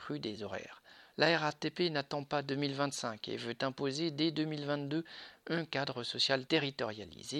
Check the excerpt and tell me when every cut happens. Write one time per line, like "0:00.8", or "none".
0:01.1